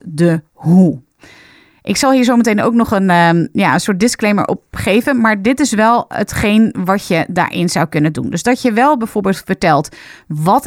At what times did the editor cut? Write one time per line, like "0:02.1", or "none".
none